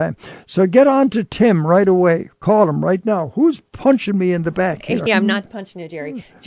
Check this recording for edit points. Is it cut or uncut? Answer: cut